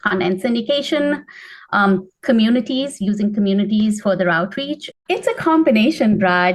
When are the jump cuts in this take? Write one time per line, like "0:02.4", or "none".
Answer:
0:04.9